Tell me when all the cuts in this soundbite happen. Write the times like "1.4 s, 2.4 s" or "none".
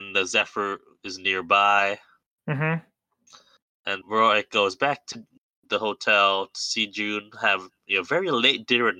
4.0 s